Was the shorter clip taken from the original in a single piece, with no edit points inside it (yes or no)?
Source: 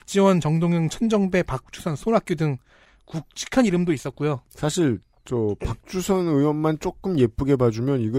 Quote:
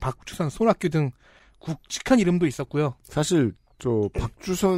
yes